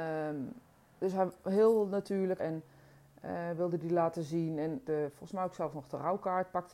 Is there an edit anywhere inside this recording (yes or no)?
yes